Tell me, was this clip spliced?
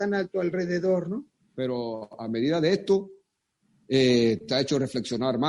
yes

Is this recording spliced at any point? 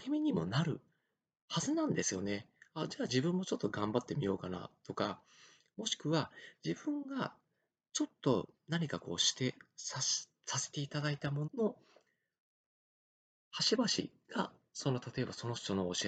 yes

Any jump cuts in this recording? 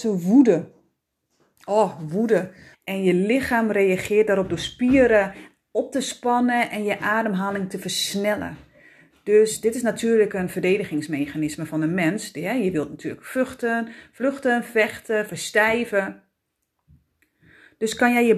yes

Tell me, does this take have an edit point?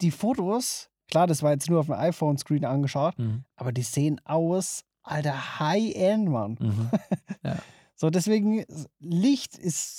no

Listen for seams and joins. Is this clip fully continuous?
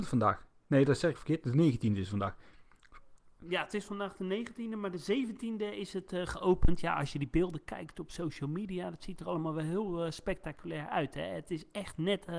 yes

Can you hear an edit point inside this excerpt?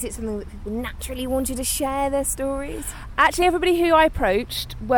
no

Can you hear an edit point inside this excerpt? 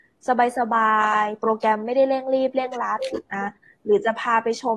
no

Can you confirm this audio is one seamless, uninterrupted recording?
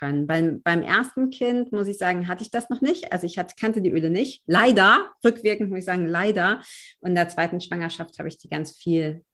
yes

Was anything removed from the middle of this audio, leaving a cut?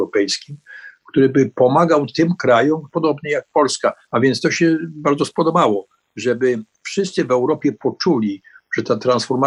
yes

